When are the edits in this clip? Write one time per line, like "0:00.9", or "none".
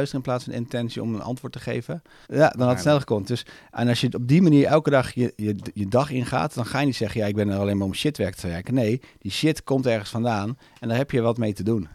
0:02.2